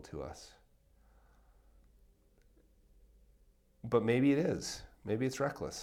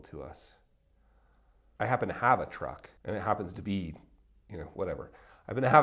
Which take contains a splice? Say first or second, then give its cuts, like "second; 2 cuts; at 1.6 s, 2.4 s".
second; 2 cuts; at 1.8 s, 3.0 s